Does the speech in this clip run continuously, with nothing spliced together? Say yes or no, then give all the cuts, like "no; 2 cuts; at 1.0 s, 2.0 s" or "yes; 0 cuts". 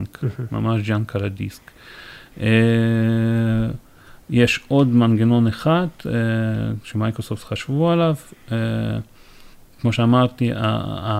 yes; 0 cuts